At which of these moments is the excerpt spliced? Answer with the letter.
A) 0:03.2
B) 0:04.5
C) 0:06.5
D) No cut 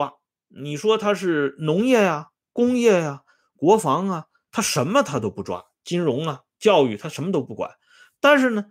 B